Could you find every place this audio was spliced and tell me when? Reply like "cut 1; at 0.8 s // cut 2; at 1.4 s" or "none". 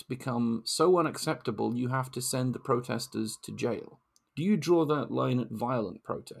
cut 1; at 4.3 s